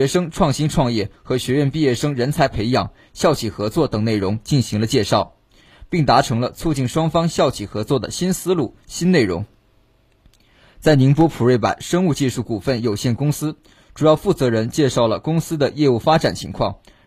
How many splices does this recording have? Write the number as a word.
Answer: zero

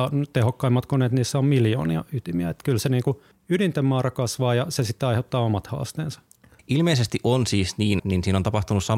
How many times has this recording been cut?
two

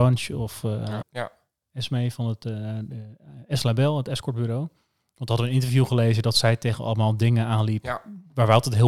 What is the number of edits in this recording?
one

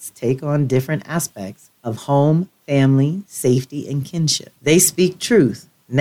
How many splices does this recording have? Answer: one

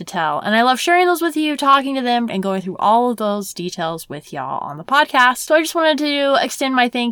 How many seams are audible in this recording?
one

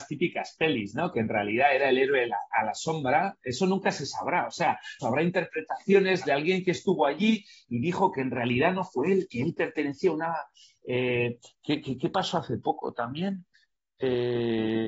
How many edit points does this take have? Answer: one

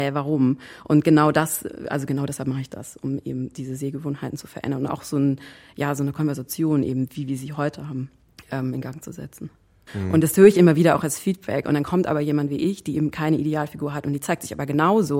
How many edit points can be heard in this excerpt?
one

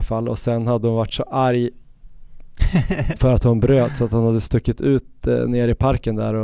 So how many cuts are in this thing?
zero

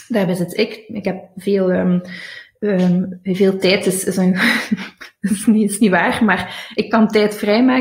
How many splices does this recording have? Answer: zero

